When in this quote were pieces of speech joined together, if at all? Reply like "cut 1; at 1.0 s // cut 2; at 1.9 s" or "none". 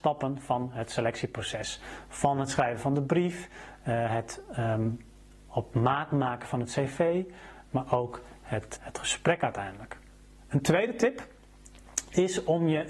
cut 1; at 8.8 s